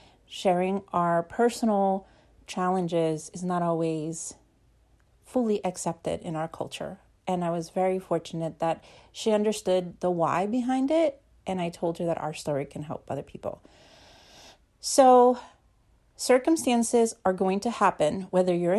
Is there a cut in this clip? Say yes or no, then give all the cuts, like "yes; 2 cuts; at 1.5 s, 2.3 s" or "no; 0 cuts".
no; 0 cuts